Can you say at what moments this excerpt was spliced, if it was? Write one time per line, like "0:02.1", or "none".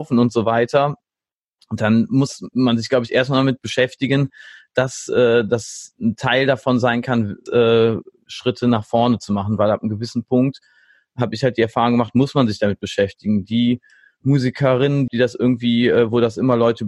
0:07.5
0:15.1